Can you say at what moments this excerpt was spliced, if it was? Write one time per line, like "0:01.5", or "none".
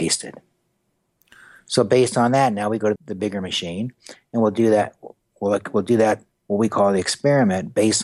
0:03.0